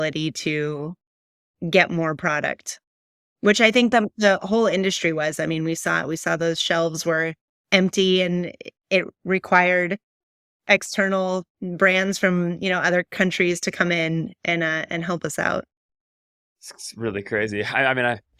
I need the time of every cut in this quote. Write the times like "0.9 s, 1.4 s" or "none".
none